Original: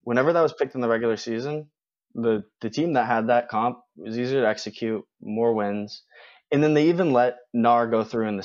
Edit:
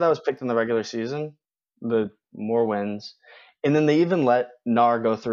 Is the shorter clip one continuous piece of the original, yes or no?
no